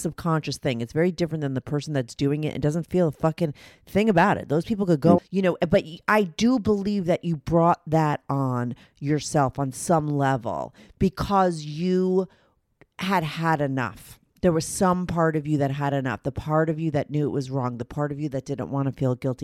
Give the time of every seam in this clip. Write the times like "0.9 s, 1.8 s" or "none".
5.2 s